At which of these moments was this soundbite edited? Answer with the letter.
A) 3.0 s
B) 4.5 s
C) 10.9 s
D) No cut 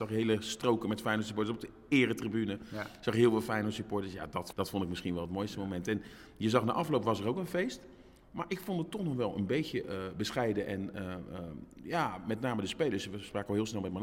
B